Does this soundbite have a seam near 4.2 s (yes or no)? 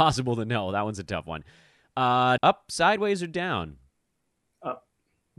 no